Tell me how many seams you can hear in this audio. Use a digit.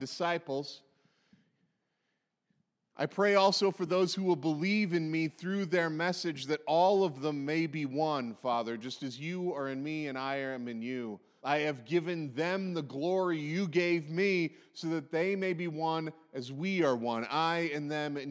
1